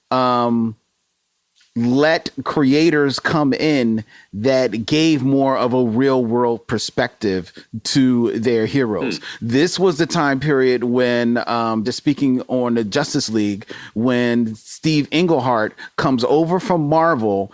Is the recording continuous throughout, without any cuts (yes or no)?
yes